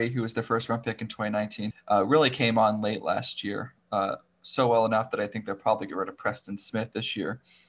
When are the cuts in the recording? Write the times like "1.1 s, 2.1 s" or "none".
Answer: 1.7 s